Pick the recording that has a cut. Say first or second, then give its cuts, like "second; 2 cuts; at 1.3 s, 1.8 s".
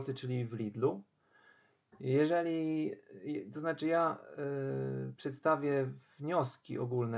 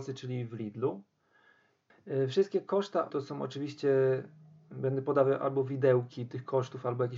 second; 2 cuts; at 1.9 s, 3.1 s